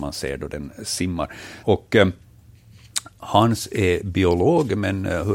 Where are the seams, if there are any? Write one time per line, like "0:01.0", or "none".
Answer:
0:01.6